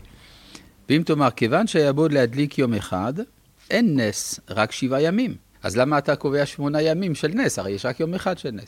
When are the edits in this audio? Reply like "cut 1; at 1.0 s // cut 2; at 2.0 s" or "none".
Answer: cut 1; at 3.7 s // cut 2; at 5.5 s